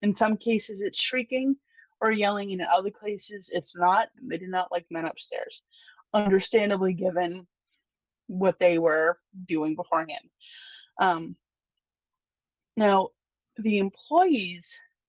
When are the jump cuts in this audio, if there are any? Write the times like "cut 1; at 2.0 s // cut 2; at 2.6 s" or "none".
cut 1; at 4.2 s